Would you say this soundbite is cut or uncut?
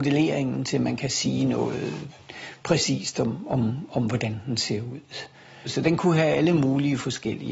cut